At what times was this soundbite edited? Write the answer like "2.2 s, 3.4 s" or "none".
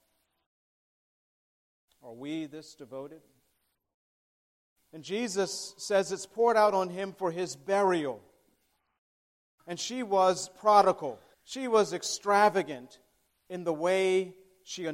1.9 s, 4.8 s, 11.3 s